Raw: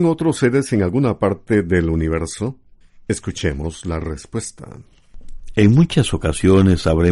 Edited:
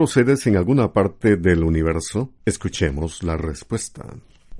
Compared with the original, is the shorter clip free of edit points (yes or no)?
no